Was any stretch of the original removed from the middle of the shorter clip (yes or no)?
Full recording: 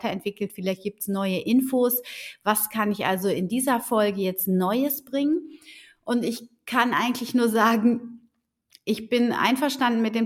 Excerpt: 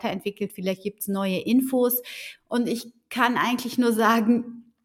yes